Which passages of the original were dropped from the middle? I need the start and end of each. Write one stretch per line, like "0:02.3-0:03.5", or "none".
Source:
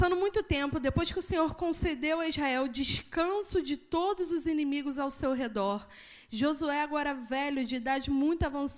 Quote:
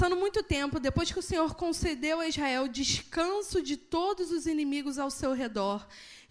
none